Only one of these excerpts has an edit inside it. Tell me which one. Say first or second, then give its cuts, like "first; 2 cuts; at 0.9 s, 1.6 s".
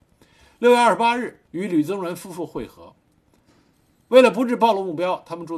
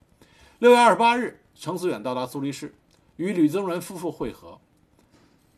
first; 1 cut; at 1.5 s